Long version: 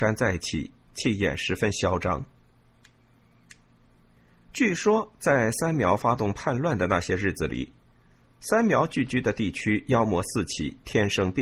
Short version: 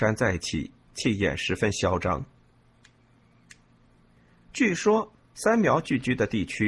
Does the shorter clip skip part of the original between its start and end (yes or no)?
yes